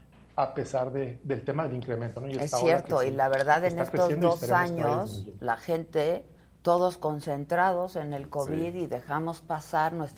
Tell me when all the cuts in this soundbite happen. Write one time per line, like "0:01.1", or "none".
none